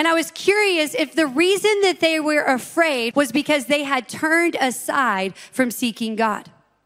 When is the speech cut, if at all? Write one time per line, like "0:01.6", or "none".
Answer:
0:03.1